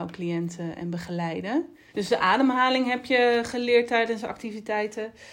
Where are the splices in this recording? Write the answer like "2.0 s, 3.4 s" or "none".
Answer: 1.9 s